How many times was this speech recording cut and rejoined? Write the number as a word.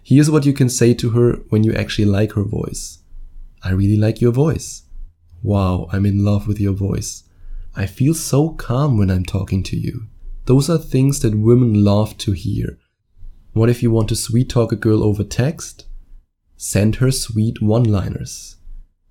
zero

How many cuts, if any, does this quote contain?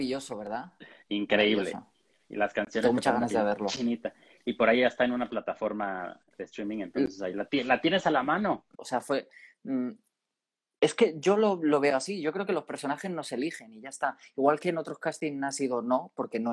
one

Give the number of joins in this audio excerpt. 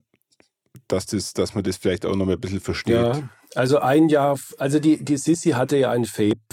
zero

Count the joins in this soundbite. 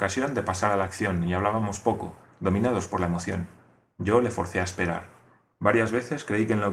two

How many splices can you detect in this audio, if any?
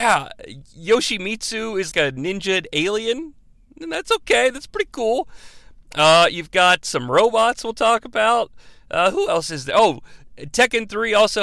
one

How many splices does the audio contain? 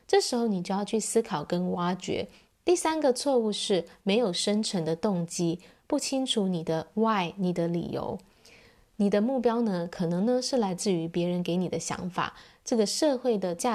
one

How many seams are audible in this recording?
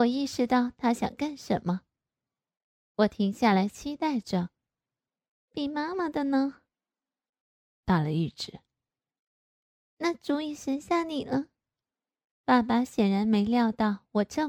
two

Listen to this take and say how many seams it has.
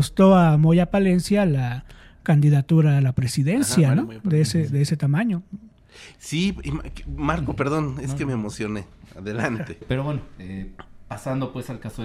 zero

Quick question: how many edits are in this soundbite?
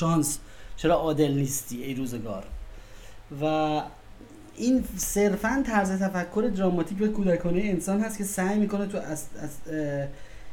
zero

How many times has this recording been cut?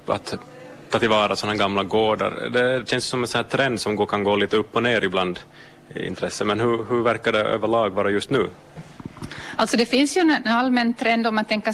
zero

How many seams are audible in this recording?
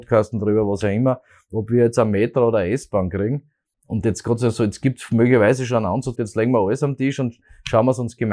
two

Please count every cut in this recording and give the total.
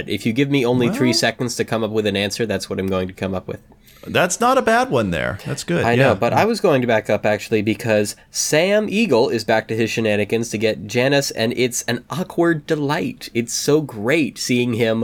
zero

